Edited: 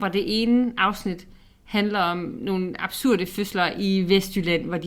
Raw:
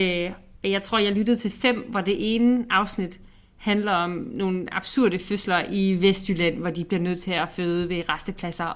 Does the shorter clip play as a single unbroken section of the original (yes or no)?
yes